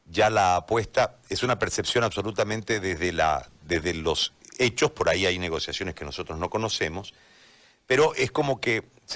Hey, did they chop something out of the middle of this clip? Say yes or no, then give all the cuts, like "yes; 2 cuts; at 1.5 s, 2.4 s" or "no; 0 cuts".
no; 0 cuts